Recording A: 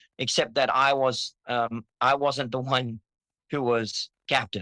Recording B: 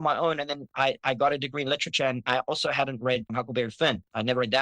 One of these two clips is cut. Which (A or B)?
B